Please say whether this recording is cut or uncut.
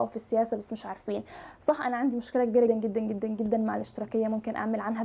cut